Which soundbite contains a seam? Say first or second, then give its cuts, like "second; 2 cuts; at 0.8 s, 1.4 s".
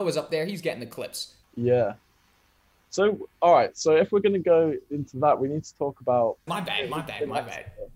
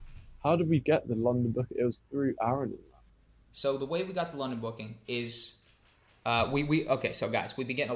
first; 2 cuts; at 1.4 s, 6.5 s